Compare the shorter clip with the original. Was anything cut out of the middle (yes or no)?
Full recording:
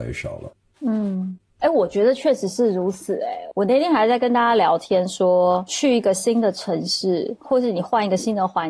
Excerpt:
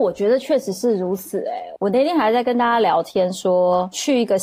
no